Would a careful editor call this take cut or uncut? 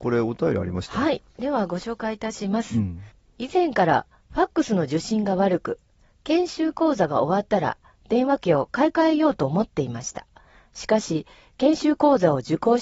uncut